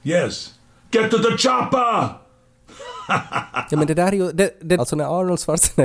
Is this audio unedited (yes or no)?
no